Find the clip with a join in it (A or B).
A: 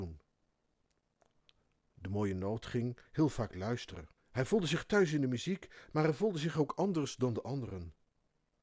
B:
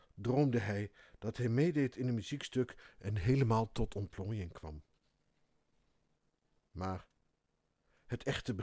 A